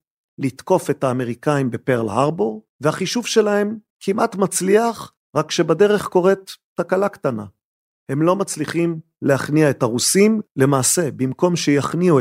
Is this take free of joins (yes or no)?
no